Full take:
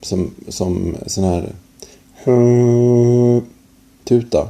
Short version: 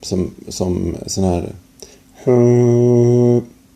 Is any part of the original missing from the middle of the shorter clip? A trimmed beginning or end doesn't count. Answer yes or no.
no